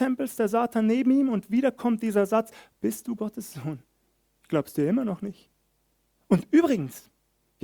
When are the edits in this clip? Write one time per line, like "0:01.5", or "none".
0:06.1

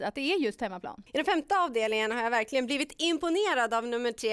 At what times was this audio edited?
0:01.1

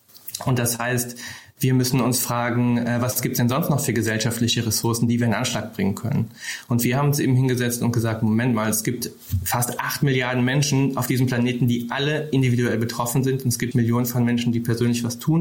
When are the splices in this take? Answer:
0:13.7

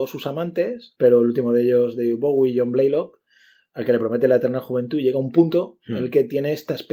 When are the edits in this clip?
none

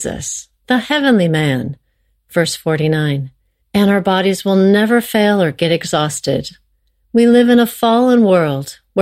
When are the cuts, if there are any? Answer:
0:03.6
0:07.0

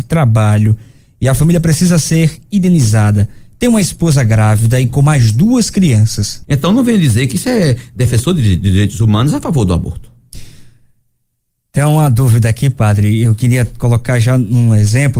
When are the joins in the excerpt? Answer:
0:06.4

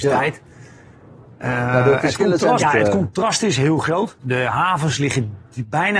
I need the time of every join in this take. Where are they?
0:02.6
0:04.2

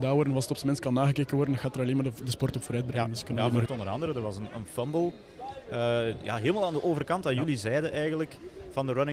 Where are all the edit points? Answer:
0:03.7

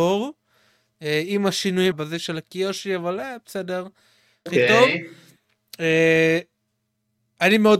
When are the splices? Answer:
0:01.9
0:04.5

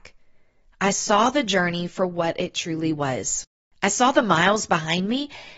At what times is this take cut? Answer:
none

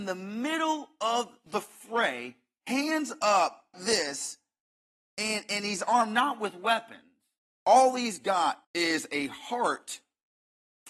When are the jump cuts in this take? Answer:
0:03.7
0:07.5
0:08.6

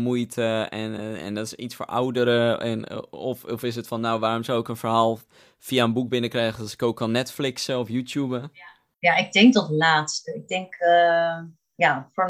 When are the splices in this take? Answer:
none

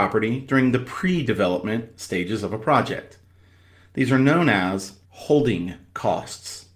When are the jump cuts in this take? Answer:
0:05.0

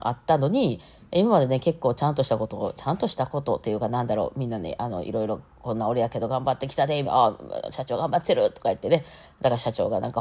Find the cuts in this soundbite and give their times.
0:05.5
0:07.0

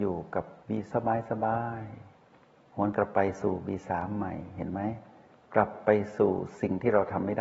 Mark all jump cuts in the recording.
0:00.9

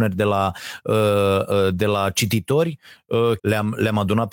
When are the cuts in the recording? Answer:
0:03.4

